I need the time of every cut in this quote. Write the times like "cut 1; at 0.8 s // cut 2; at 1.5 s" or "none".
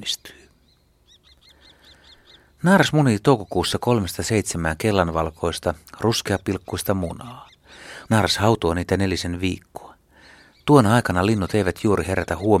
cut 1; at 8.1 s